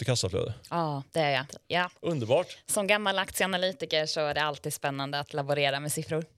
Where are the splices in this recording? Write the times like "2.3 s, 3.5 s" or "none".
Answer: 1.5 s